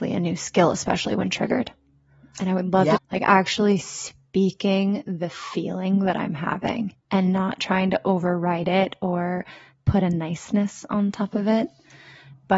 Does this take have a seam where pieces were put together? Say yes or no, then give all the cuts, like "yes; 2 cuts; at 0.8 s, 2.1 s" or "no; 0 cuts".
yes; 2 cuts; at 3.0 s, 7.0 s